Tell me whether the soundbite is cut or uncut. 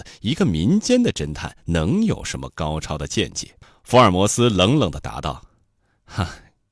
uncut